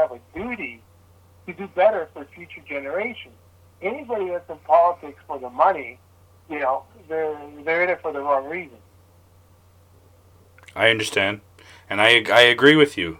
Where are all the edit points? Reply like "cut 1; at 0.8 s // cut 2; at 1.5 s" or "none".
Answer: cut 1; at 1.4 s